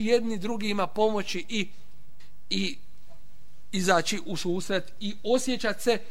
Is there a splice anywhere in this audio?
no; 0 cuts

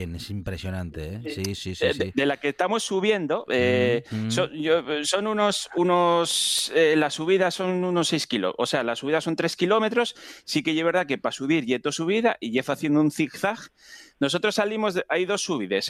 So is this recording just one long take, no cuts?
yes; 0 cuts

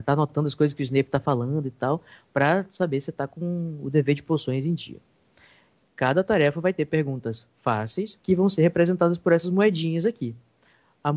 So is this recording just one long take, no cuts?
no; 2 cuts; at 5.8 s, 8.2 s

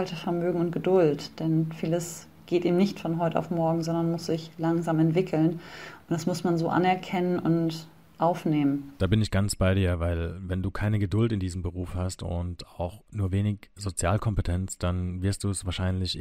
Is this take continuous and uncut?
yes; 0 cuts

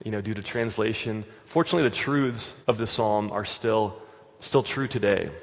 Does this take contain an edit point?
yes; 1 cut; at 2.6 s

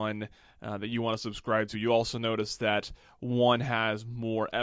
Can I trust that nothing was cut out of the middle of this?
yes; 0 cuts

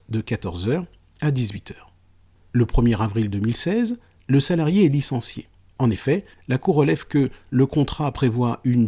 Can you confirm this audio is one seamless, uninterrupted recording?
no; 1 cut; at 5.7 s

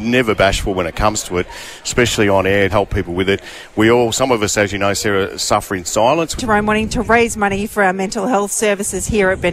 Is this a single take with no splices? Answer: no; 2 cuts; at 2.7 s, 6.4 s

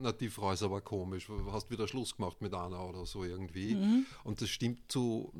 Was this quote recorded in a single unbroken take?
yes; 0 cuts

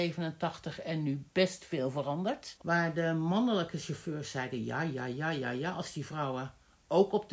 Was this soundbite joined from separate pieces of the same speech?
yes; 1 cut; at 2.6 s

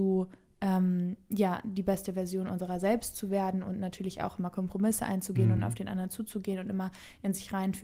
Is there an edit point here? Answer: no; 0 cuts

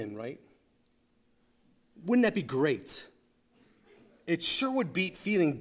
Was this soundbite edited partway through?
no; 0 cuts

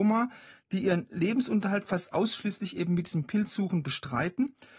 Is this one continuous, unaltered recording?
yes; 0 cuts

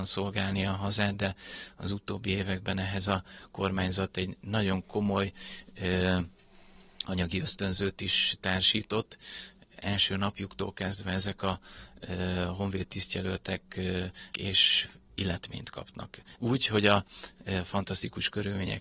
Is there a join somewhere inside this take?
yes; 2 cuts; at 14.3 s, 16.3 s

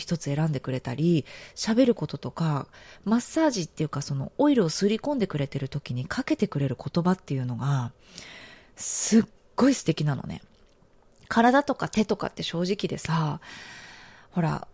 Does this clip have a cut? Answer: no; 0 cuts

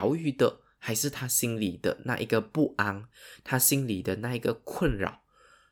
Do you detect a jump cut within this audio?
no; 0 cuts

